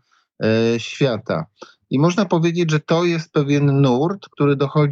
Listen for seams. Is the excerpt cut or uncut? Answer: uncut